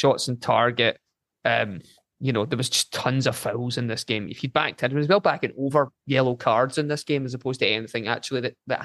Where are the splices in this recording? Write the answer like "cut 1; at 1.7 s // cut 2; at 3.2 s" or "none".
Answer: none